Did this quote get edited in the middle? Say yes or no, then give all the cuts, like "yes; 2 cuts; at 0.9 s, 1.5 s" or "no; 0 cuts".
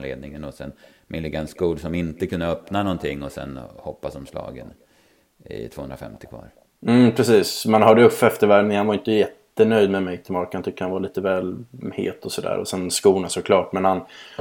no; 0 cuts